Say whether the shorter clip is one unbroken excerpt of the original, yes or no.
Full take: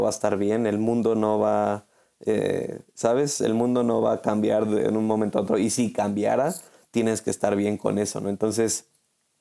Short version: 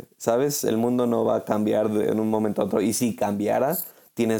yes